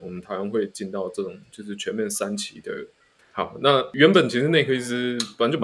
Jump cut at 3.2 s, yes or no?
yes